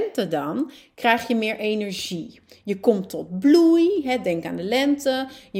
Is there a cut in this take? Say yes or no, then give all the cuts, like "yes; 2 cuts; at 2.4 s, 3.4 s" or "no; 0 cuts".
no; 0 cuts